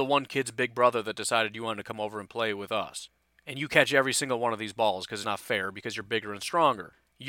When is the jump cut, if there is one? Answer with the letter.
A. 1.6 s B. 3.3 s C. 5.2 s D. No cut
C